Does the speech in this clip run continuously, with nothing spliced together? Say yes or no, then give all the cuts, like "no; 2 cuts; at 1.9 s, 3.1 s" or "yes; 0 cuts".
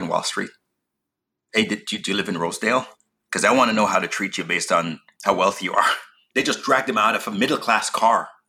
yes; 0 cuts